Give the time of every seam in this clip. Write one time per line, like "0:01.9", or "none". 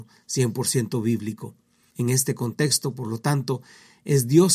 0:01.9